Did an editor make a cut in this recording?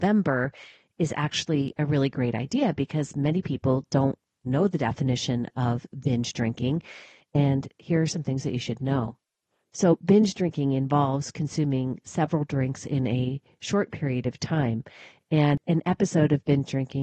yes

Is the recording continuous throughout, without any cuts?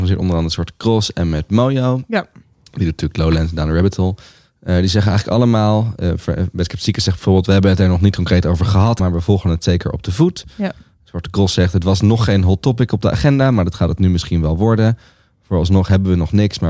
no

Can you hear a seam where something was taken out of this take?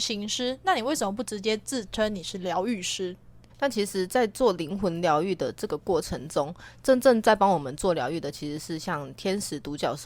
yes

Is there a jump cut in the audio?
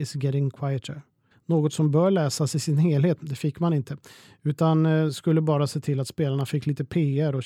yes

